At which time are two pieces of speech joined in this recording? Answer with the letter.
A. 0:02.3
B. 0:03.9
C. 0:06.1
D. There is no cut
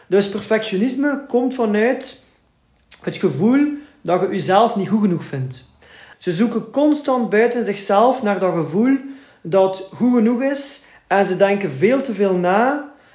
C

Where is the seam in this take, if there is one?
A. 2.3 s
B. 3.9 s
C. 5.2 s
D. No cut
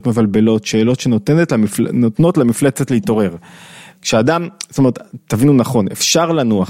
B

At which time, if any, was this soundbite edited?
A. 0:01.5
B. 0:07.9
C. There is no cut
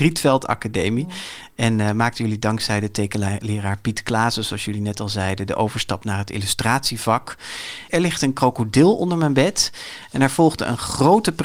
B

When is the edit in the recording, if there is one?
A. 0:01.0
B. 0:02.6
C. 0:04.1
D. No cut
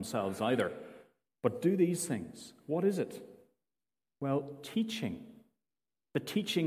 D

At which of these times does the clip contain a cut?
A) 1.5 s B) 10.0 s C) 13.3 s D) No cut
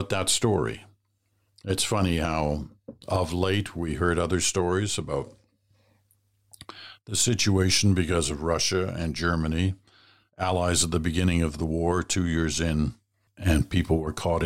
C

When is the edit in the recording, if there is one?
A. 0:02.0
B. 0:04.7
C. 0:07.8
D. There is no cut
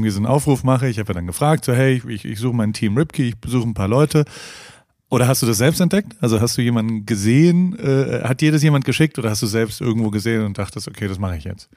D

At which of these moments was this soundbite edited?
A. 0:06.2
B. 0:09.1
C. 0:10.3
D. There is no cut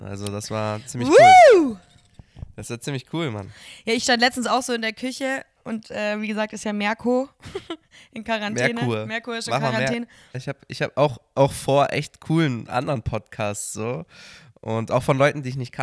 C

